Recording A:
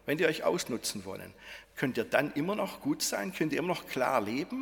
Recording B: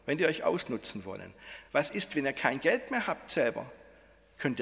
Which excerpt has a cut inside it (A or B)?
A